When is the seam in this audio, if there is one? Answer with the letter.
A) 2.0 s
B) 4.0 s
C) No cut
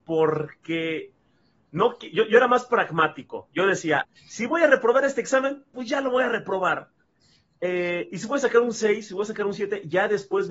B